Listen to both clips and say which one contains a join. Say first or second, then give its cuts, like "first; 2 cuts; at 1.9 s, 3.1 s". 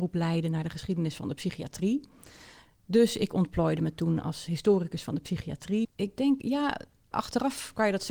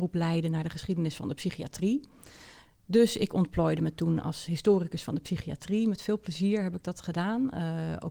first; 1 cut; at 5.8 s